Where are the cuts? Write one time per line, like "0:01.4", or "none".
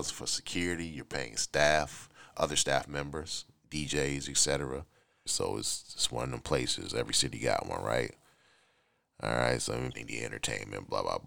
0:05.3
0:09.9